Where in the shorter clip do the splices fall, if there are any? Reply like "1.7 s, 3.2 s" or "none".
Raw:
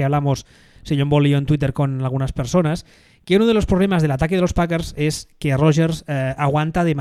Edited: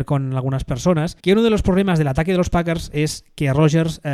1.2 s